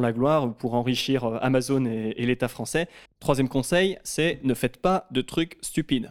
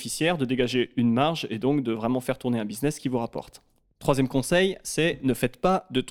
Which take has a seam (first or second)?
first